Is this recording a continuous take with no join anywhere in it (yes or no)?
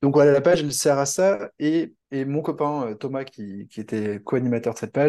no